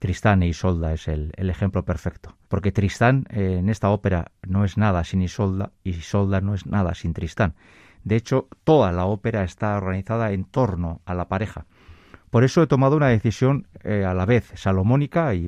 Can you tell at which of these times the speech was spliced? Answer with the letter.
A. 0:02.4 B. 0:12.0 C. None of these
A